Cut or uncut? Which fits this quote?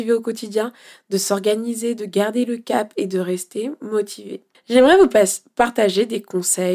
cut